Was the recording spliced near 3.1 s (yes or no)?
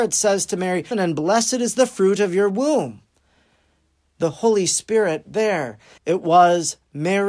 no